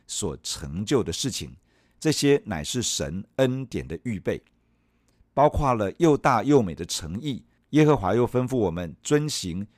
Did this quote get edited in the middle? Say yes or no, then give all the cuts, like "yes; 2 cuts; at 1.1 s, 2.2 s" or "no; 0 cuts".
yes; 1 cut; at 7.6 s